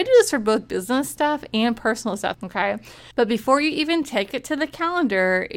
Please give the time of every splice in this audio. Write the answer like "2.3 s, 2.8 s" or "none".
2.3 s